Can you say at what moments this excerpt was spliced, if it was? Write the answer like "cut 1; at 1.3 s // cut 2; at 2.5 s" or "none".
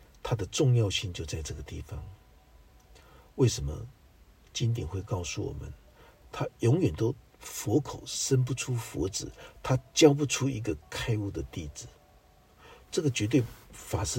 cut 1; at 6.2 s

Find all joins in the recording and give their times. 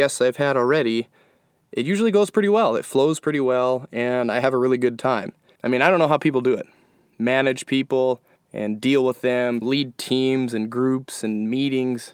cut 1; at 5.6 s // cut 2; at 8.4 s // cut 3; at 9.6 s

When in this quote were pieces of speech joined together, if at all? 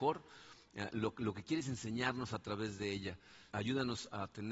cut 1; at 3.5 s

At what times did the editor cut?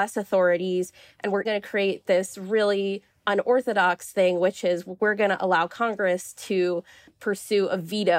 cut 1; at 1.4 s

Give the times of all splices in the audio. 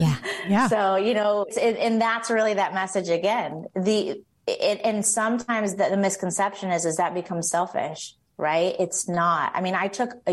cut 1; at 1.5 s

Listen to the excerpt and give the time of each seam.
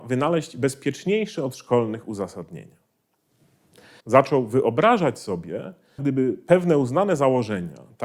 cut 1; at 4.0 s // cut 2; at 6.0 s

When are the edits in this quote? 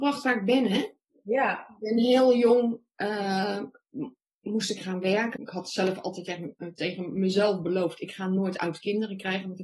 cut 1; at 5.4 s

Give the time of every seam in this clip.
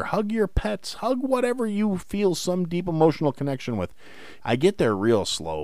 cut 1; at 4.4 s

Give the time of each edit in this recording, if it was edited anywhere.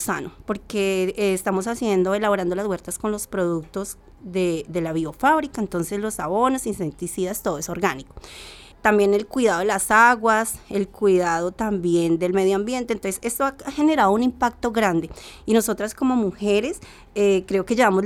cut 1; at 8.7 s

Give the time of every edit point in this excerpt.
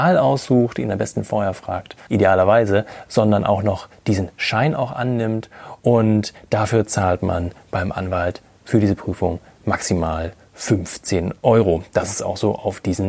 cut 1; at 2.1 s // cut 2; at 5.8 s

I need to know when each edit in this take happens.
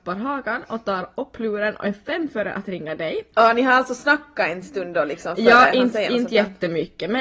none

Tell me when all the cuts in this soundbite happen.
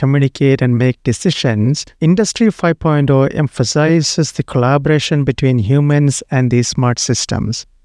cut 1; at 1.9 s

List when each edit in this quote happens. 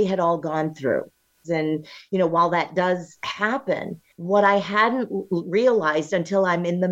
cut 1; at 1.4 s // cut 2; at 4.1 s

